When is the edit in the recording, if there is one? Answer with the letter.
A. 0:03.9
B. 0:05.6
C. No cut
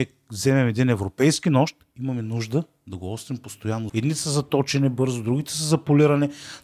A